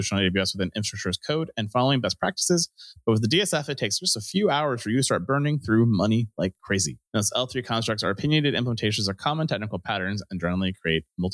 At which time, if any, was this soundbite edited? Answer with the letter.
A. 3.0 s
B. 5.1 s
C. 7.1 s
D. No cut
C